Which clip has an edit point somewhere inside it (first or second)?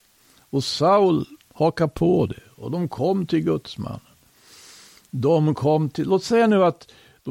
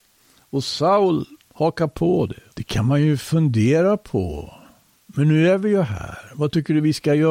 second